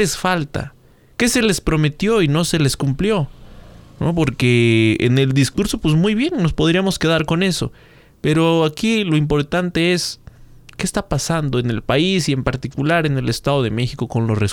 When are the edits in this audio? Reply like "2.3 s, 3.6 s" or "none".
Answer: none